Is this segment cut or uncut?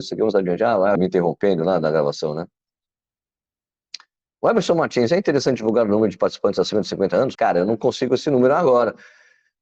cut